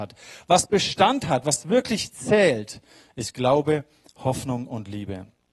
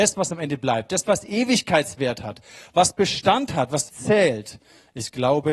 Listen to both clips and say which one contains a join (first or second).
second